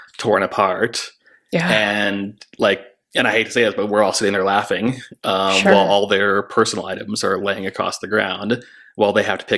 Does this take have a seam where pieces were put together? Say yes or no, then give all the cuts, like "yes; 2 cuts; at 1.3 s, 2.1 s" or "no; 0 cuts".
no; 0 cuts